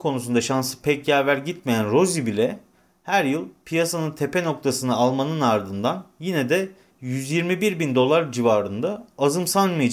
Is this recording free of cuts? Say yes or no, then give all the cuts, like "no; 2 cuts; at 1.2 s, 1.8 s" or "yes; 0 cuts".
yes; 0 cuts